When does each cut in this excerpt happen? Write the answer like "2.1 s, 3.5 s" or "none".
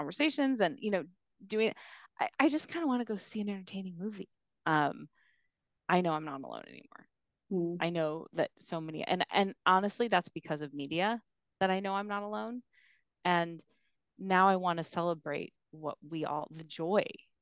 4.6 s